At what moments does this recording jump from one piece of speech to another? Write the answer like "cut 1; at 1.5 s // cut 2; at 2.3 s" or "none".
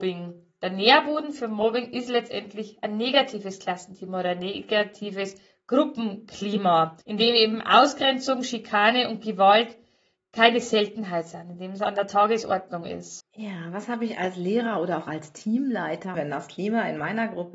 cut 1; at 7.0 s // cut 2; at 13.2 s // cut 3; at 16.1 s